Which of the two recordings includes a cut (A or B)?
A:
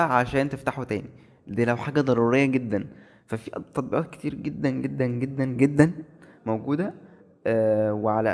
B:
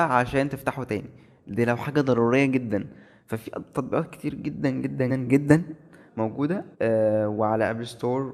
B